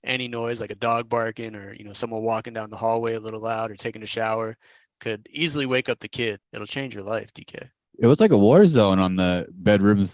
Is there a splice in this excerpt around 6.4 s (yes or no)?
yes